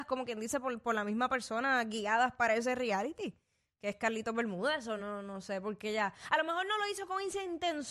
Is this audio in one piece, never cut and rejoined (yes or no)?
yes